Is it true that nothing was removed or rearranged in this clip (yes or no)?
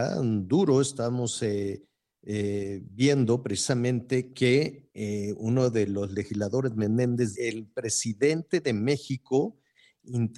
no